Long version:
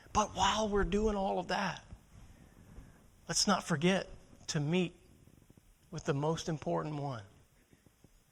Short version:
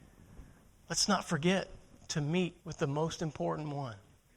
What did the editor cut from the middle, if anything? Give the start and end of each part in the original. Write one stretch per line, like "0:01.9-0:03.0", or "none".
0:05.0-0:05.9